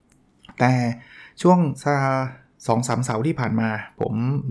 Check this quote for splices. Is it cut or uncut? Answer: uncut